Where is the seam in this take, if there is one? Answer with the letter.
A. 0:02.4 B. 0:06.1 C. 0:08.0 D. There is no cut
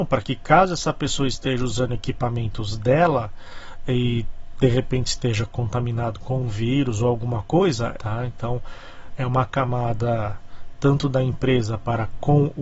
C